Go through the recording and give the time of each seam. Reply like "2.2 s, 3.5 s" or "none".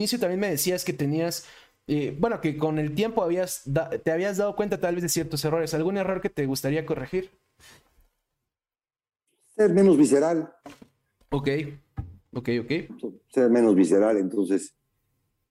none